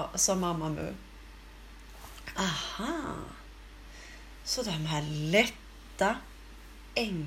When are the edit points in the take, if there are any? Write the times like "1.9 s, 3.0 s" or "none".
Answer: none